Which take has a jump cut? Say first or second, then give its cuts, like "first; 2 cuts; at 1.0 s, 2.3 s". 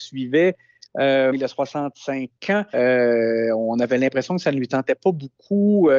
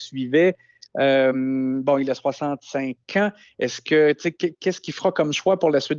first; 2 cuts; at 1.3 s, 2.7 s